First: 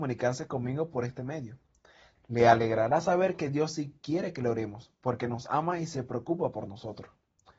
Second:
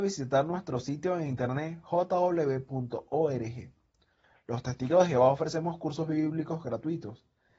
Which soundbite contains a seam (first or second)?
first